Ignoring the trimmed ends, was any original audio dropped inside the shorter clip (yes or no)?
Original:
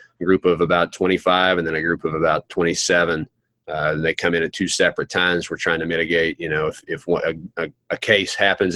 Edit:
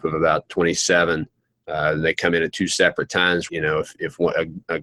yes